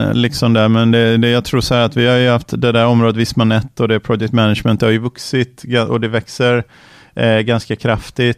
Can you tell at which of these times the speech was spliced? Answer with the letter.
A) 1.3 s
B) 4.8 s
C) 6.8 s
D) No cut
D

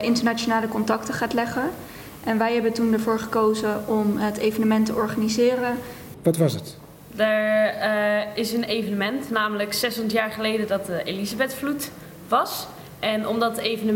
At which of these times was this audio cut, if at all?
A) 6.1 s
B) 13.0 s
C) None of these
A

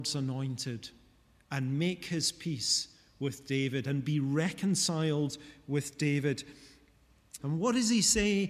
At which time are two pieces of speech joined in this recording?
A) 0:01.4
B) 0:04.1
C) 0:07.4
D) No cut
C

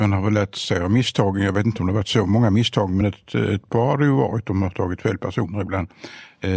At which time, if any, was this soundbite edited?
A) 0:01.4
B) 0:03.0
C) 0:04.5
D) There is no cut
D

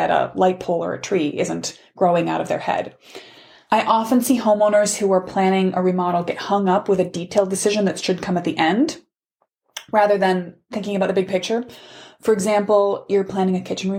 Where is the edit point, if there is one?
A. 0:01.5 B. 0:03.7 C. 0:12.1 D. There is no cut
B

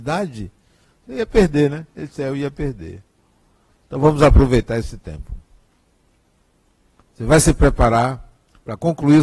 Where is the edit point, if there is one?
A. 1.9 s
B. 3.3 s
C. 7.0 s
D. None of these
D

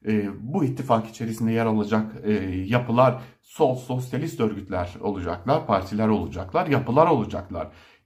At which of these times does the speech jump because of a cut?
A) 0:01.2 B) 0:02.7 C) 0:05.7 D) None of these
D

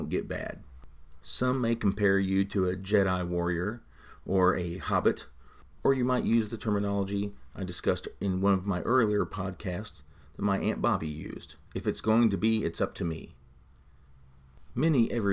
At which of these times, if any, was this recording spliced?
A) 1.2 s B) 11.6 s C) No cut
B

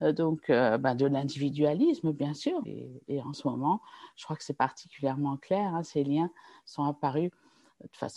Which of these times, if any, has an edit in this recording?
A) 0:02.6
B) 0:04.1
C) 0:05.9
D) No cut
A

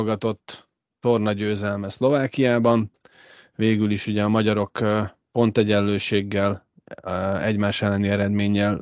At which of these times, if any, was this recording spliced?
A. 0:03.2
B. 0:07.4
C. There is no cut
C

